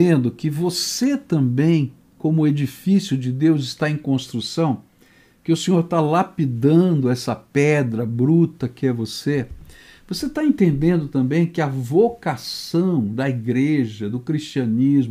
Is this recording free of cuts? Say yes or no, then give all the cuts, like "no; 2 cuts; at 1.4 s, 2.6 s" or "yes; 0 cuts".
yes; 0 cuts